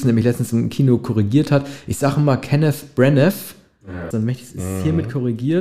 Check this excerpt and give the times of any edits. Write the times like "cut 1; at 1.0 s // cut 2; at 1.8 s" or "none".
cut 1; at 4.1 s